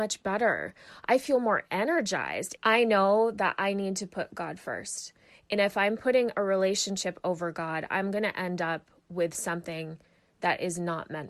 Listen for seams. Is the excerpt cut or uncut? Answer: cut